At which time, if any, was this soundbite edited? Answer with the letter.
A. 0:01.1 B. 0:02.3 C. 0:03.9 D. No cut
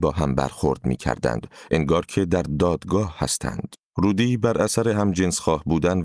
C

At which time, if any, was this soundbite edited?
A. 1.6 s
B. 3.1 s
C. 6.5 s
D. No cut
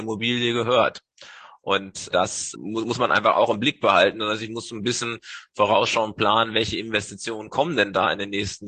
D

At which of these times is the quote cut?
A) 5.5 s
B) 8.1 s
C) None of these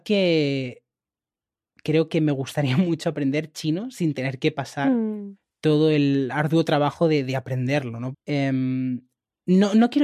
B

